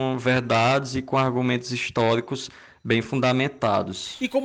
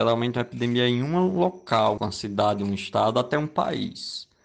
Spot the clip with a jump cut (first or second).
second